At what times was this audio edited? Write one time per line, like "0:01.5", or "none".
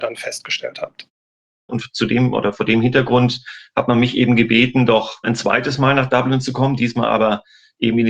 0:01.7